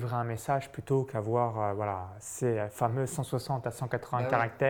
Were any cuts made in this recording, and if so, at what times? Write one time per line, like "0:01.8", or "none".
none